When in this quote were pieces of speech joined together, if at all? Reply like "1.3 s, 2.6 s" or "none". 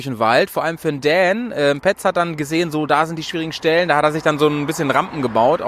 none